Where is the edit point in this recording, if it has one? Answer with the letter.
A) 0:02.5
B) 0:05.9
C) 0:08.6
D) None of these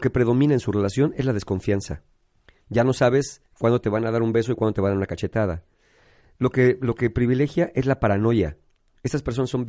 D